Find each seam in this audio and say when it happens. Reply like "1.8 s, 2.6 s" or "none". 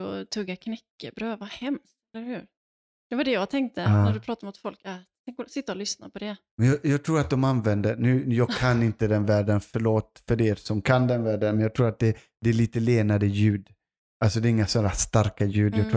none